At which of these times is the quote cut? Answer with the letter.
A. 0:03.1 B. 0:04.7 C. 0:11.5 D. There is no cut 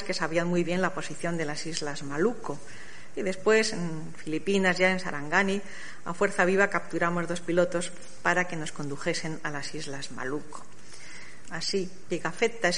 C